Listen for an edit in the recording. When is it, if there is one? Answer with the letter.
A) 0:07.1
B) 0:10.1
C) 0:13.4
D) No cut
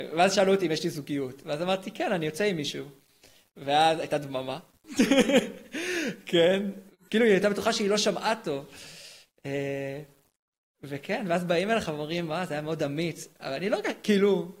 A